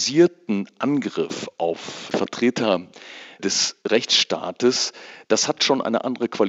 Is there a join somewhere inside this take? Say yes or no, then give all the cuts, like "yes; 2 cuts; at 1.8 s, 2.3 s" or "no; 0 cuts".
no; 0 cuts